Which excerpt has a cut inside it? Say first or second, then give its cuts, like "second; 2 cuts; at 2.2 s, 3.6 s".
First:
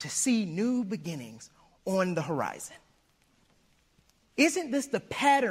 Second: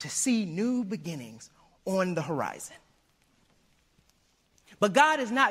first; 1 cut; at 4.2 s